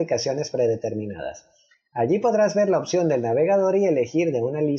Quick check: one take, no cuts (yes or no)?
yes